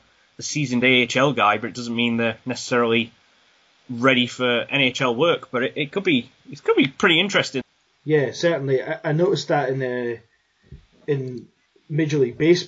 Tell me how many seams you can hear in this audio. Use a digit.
1